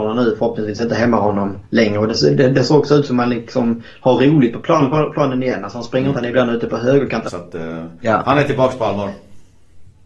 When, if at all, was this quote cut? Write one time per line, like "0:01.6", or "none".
0:06.1
0:07.3